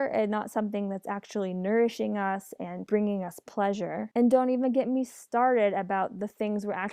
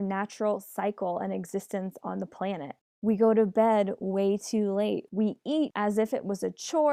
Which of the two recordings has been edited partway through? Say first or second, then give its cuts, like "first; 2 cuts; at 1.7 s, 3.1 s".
second; 1 cut; at 5.1 s